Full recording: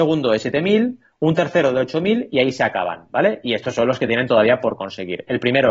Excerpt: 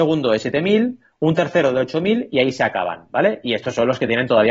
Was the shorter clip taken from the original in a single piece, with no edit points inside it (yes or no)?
yes